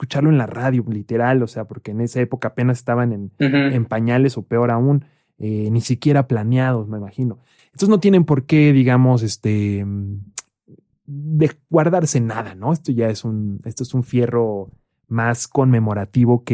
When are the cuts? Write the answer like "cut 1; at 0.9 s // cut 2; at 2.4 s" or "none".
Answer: cut 1; at 7.6 s